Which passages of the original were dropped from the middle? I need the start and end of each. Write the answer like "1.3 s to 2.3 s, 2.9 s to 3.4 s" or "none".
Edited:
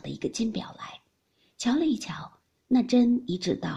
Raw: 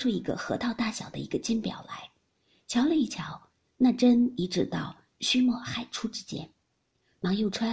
none